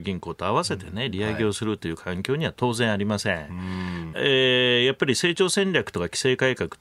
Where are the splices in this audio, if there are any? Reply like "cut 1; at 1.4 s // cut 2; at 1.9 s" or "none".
cut 1; at 4.1 s